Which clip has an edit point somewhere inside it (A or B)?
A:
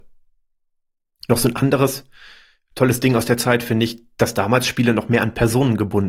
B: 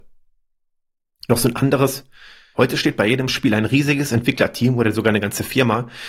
B